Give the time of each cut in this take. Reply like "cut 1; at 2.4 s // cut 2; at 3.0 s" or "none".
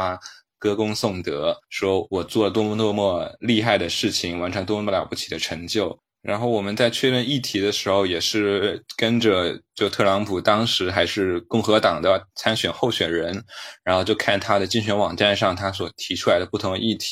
cut 1; at 6.2 s